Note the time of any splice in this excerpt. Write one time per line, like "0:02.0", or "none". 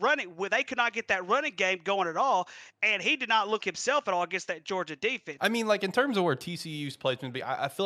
0:03.6
0:05.4